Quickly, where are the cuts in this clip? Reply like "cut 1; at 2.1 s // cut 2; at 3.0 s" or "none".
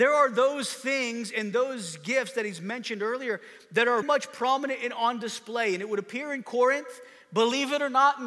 cut 1; at 4.0 s

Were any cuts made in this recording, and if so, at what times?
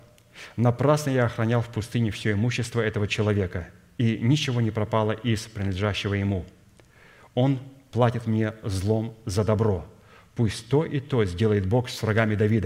none

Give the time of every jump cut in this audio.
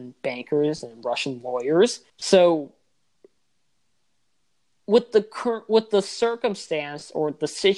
cut 1; at 2.1 s

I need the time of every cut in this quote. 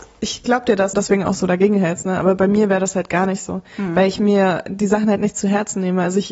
cut 1; at 0.9 s

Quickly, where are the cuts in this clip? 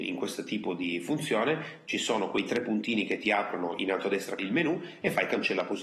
cut 1; at 4.4 s

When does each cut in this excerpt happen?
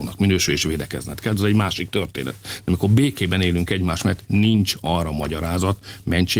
none

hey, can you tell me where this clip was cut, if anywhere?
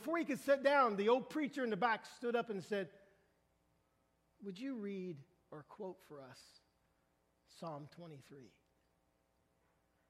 none

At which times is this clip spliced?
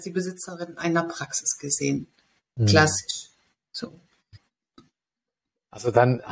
cut 1; at 4.4 s

